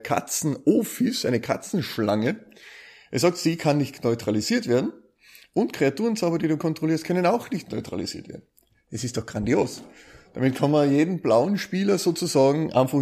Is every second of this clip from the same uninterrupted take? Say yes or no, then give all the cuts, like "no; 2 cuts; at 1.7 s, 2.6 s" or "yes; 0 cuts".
yes; 0 cuts